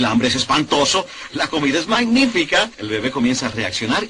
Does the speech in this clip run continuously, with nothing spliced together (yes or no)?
no